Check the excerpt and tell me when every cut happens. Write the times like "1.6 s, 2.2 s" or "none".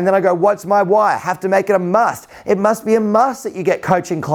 none